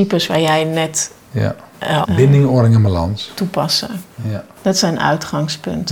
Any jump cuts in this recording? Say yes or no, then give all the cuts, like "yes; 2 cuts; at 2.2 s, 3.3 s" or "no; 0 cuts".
yes; 1 cut; at 2.0 s